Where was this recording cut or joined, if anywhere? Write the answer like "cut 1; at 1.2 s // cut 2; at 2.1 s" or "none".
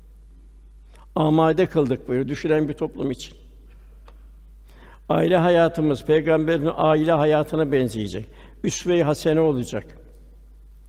none

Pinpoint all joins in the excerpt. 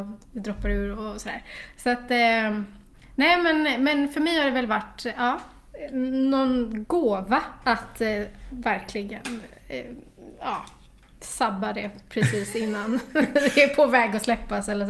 none

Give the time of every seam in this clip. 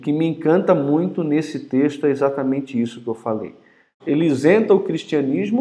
cut 1; at 4.0 s

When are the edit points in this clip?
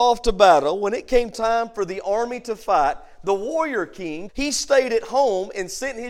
cut 1; at 4.3 s

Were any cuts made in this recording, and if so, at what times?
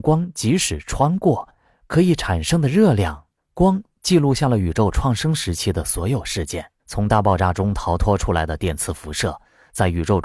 cut 1; at 3.4 s // cut 2; at 6.8 s

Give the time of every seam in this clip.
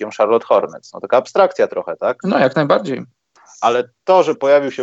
cut 1; at 2.2 s

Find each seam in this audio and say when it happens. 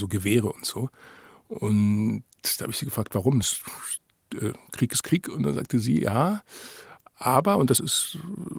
none

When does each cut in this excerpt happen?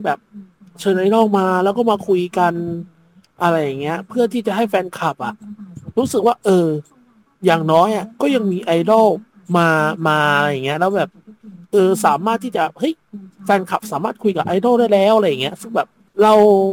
none

